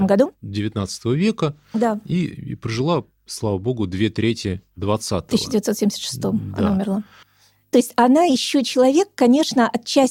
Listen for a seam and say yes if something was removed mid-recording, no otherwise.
no